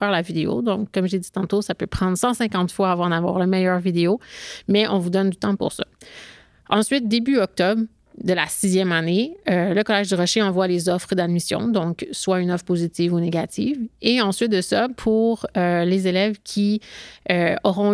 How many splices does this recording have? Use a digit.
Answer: 0